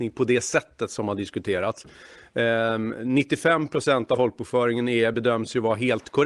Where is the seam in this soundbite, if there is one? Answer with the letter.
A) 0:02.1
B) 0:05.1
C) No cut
C